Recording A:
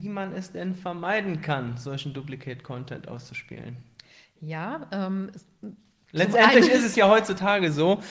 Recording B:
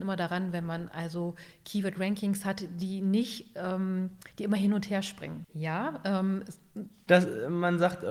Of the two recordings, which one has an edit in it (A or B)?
B